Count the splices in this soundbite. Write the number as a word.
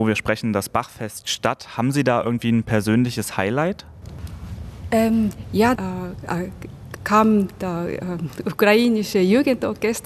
two